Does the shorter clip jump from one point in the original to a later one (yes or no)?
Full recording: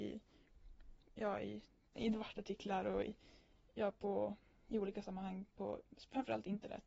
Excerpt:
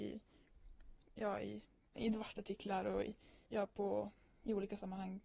yes